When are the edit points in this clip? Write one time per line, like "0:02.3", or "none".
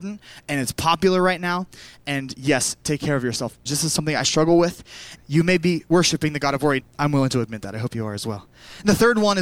0:03.7
0:05.2
0:06.8